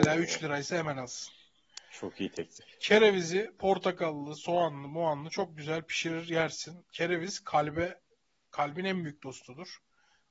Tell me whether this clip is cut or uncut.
uncut